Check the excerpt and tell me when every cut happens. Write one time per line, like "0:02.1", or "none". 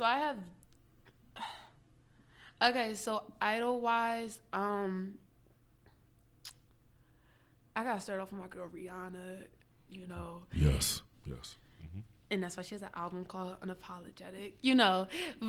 0:11.1